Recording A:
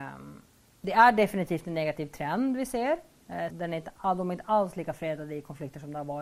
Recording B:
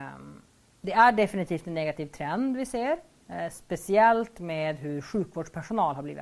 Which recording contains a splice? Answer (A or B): A